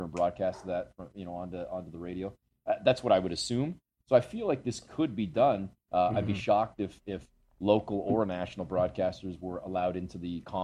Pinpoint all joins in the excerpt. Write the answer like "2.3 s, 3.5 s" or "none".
5.8 s